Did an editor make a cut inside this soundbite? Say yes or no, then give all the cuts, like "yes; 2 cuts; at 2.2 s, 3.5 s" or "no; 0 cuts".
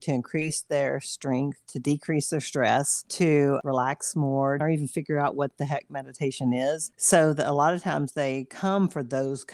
yes; 2 cuts; at 4.6 s, 6.9 s